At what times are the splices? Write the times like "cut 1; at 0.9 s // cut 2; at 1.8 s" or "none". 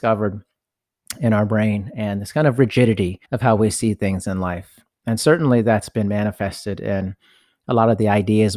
cut 1; at 3.2 s